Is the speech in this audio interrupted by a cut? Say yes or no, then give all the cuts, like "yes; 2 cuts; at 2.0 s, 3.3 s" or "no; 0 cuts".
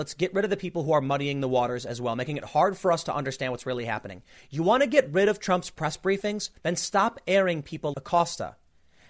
yes; 2 cuts; at 6.6 s, 7.9 s